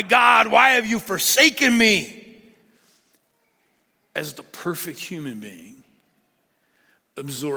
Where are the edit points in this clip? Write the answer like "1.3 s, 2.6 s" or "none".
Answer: none